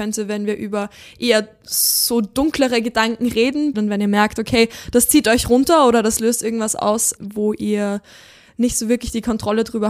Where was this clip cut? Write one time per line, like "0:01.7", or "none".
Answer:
0:03.7
0:07.2